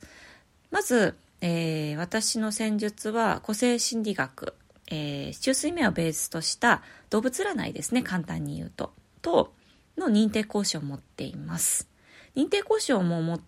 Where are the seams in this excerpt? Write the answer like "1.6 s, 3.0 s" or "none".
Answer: none